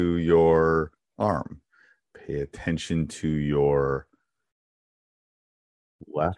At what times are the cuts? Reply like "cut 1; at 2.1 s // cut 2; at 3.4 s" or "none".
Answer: none